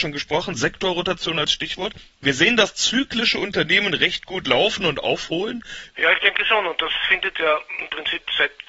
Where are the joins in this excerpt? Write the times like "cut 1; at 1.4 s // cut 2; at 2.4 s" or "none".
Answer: cut 1; at 5.9 s